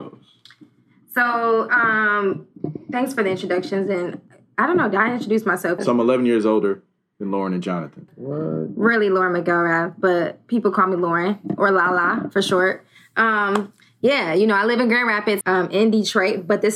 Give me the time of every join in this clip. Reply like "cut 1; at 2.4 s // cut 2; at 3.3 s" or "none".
cut 1; at 5.8 s // cut 2; at 8.1 s // cut 3; at 15.4 s